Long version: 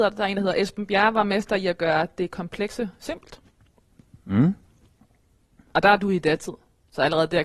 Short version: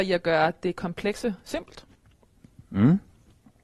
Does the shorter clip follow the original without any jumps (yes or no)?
yes